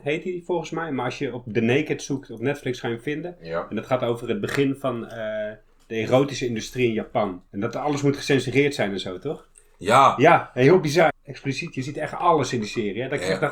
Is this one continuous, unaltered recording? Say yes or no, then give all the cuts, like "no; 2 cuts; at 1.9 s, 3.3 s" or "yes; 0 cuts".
no; 2 cuts; at 7.5 s, 11.1 s